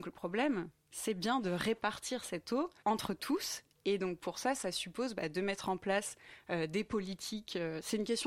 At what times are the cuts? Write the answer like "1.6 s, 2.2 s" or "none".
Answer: 2.8 s